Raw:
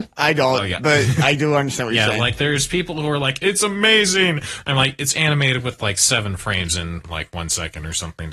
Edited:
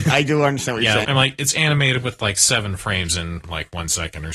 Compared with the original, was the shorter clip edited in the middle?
yes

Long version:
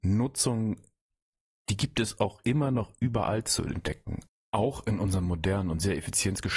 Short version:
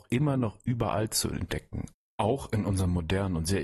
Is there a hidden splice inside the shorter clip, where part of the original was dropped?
no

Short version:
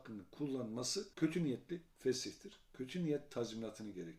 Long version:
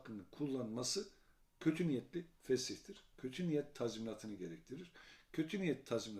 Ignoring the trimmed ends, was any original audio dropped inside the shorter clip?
yes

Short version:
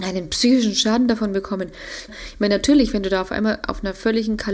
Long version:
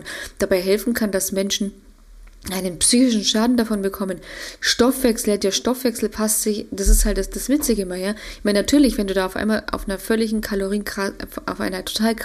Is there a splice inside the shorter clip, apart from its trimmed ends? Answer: yes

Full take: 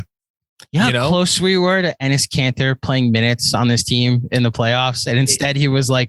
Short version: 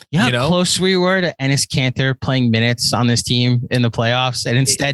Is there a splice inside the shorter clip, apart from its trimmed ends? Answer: no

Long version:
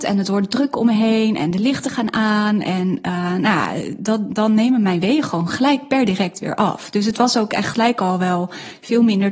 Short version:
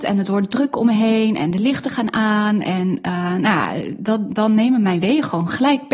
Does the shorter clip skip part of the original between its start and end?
no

